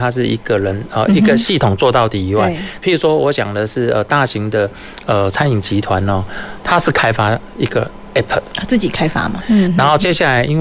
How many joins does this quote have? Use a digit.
2